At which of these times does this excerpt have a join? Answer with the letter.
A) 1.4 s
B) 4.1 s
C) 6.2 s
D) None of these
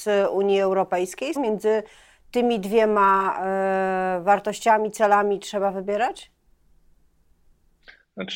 A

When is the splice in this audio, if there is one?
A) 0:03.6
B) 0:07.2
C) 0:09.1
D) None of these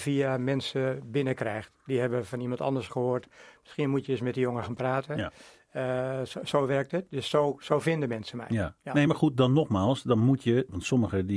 D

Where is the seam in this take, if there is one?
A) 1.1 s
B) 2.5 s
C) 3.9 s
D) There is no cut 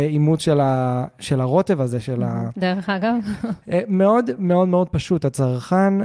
B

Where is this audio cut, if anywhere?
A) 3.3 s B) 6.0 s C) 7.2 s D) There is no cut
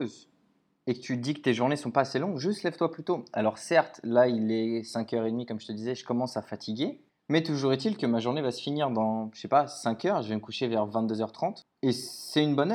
D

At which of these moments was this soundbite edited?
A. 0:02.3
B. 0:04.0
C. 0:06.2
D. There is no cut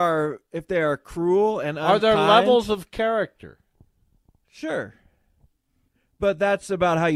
D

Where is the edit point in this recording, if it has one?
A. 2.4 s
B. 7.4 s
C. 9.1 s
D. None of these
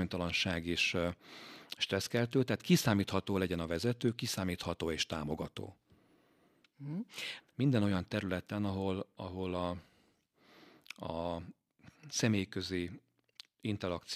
B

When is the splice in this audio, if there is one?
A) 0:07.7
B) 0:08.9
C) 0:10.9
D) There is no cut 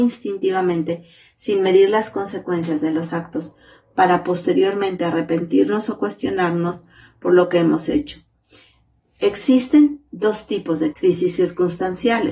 C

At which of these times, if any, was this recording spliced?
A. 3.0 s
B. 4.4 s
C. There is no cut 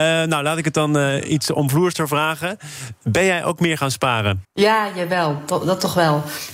B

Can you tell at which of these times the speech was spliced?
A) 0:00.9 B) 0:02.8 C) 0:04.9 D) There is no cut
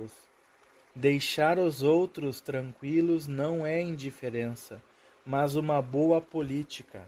A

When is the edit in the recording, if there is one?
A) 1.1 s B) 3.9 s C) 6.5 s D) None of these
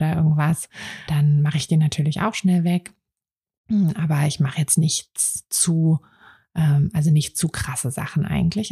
A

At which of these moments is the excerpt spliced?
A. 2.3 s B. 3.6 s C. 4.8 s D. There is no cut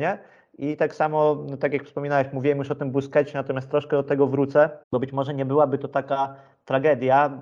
C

